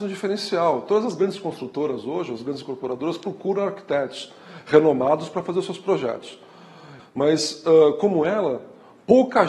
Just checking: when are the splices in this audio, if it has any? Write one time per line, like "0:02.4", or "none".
0:07.0